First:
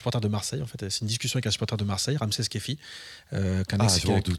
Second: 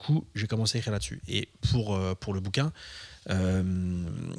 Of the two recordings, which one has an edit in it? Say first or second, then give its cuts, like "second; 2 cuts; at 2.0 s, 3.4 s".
second; 1 cut; at 1.6 s